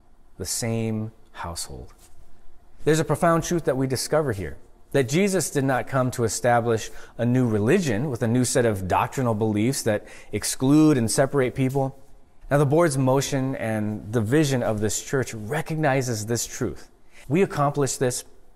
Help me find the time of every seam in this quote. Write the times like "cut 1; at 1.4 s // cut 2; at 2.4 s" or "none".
cut 1; at 12.4 s // cut 2; at 17.2 s